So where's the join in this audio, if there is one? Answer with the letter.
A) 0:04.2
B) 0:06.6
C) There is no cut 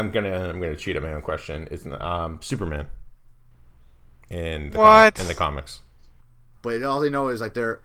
B